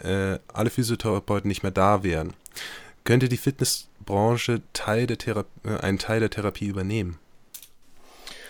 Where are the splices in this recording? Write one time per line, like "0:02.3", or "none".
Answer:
none